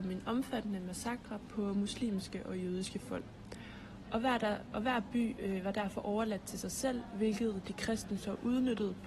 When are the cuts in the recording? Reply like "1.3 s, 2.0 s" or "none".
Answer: 4.0 s